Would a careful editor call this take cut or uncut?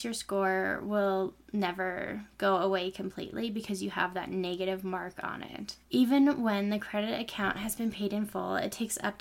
cut